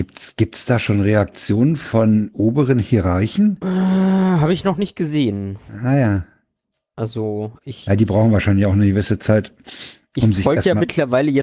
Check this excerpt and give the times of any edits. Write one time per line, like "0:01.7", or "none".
none